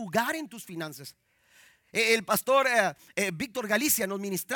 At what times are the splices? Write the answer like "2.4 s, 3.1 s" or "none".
none

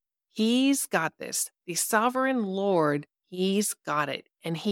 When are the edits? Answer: 3.1 s

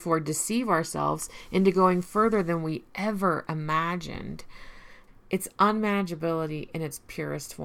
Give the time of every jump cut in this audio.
5.1 s

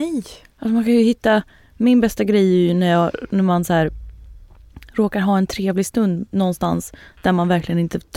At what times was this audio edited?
none

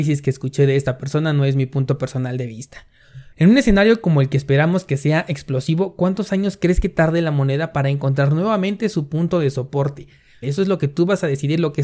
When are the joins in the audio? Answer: 3.3 s, 10.4 s

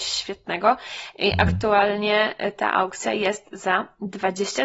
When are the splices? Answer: none

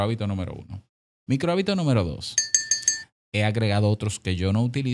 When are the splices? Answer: 3.2 s

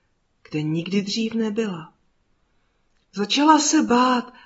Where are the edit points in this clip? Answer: none

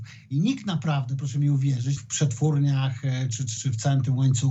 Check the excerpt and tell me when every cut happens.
2.0 s, 3.6 s

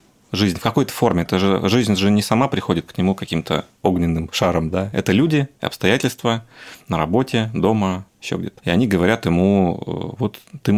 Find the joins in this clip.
none

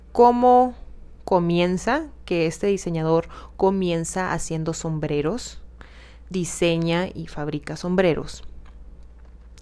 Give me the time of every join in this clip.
none

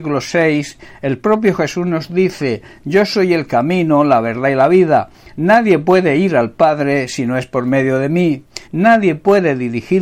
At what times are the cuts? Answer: 8.6 s

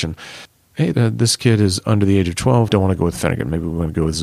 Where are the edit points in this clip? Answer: 0.9 s, 2.7 s

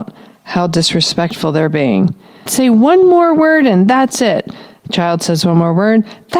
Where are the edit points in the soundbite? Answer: 2.5 s

